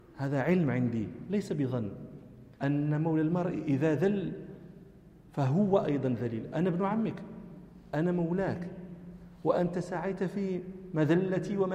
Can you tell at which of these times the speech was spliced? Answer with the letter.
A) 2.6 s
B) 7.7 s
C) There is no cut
A